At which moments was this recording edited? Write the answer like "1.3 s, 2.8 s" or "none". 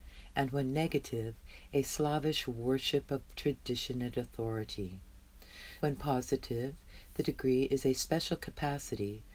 5.8 s